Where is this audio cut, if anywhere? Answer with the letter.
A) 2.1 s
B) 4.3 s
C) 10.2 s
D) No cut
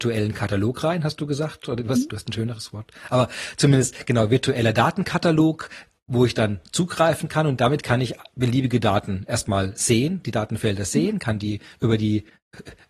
A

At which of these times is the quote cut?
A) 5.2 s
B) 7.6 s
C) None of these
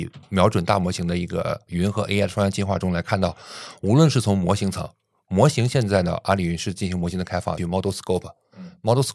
B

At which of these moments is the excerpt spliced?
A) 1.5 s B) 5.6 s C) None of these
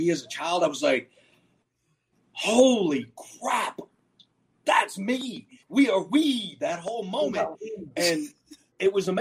B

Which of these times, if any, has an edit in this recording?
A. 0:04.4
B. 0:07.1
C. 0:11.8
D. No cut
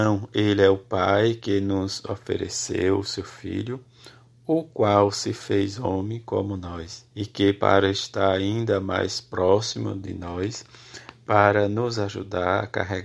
B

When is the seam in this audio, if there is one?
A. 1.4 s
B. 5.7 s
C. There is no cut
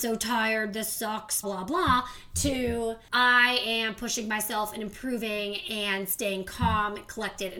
A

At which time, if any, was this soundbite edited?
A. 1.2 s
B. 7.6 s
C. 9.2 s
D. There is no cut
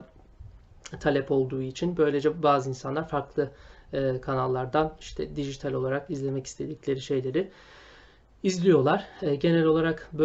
D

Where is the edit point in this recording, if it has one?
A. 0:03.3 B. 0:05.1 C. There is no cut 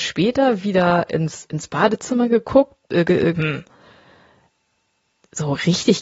A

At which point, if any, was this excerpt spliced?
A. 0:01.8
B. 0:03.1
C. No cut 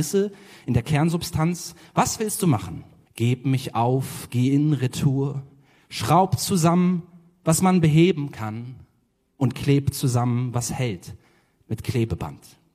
B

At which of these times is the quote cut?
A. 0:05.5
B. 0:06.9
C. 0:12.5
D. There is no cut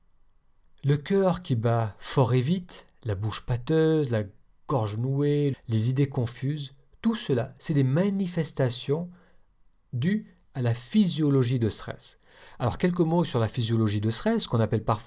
A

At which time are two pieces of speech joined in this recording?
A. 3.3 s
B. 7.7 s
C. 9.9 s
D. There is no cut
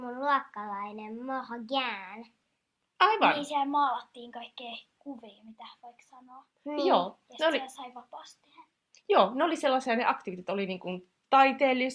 D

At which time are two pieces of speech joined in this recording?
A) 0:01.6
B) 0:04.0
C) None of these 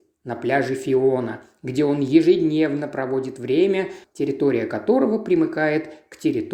B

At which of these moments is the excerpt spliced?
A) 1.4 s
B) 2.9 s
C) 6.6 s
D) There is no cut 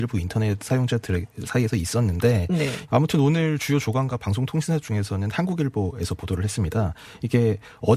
B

